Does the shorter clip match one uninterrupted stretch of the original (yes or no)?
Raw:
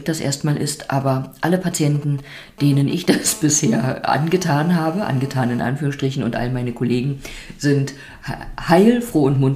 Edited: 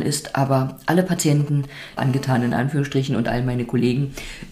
no